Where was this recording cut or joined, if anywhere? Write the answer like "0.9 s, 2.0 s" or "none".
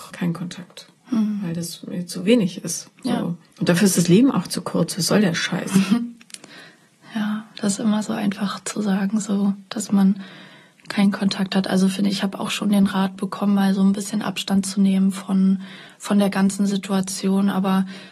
none